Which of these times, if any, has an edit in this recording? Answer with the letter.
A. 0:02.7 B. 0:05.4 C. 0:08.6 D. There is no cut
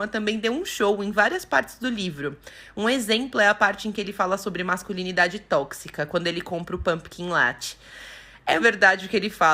C